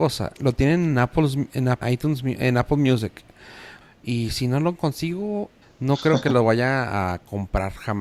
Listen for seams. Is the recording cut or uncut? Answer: cut